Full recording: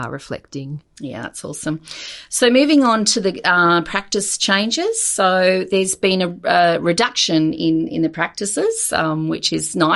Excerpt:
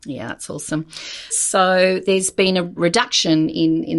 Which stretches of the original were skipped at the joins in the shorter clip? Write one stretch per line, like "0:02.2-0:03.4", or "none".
0:02.2-0:04.9
0:06.4-0:06.8